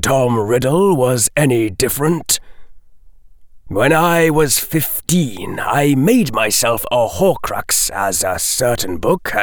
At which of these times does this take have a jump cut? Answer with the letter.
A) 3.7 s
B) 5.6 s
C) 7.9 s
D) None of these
A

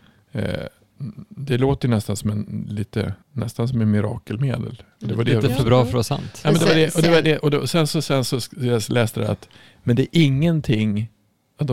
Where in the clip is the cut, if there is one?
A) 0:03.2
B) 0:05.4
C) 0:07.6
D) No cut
A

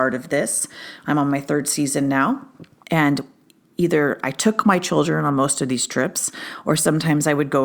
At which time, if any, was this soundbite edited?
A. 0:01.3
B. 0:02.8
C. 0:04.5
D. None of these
B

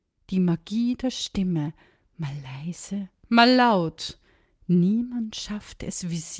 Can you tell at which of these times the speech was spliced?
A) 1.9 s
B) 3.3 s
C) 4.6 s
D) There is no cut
D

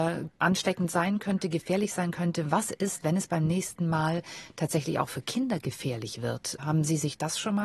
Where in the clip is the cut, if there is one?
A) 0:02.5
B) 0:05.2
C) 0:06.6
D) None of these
D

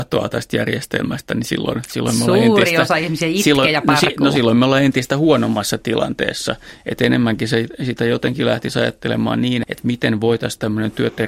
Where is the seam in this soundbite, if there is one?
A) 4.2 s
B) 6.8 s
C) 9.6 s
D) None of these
C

